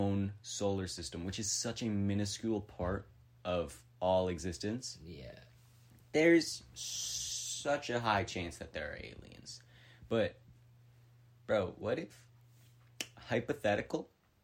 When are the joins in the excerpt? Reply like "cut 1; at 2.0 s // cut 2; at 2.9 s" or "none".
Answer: none